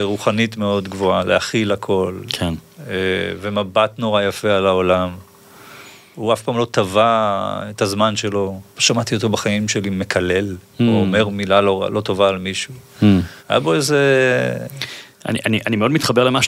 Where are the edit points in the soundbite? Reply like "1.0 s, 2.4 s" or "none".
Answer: 8.7 s, 13.4 s